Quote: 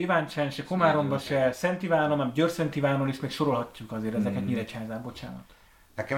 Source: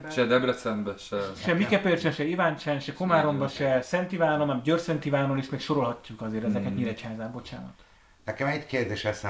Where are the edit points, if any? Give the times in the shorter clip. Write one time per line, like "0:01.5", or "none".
none